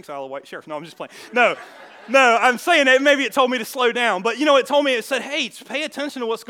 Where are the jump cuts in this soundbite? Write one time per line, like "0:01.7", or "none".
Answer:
none